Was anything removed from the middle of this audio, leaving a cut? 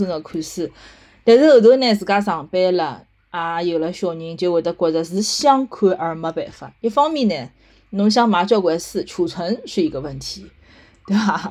no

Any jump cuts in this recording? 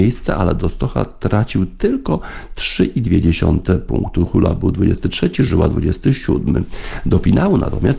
no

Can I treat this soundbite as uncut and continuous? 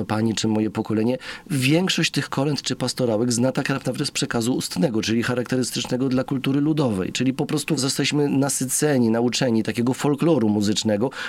yes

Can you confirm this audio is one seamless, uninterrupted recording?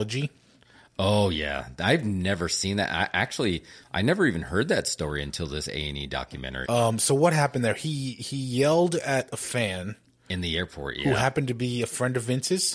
no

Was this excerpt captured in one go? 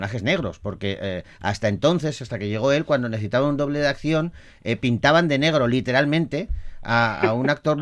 yes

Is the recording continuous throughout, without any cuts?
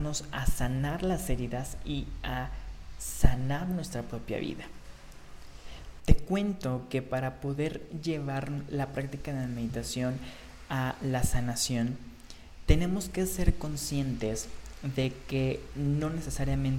no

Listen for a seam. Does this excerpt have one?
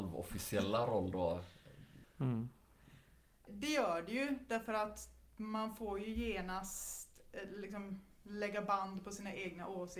yes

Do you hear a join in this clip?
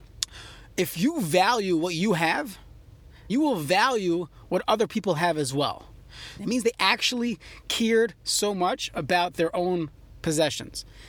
yes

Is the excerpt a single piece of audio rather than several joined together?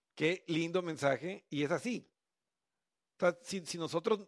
yes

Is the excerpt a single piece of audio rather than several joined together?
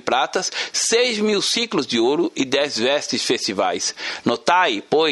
no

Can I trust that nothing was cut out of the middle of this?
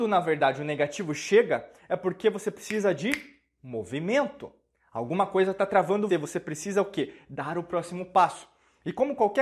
no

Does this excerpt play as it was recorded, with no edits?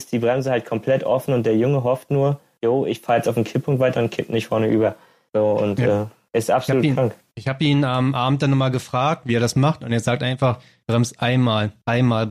yes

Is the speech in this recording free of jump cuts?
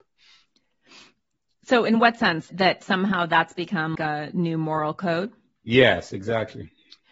no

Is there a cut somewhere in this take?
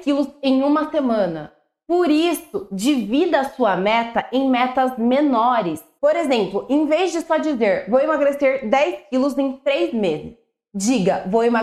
yes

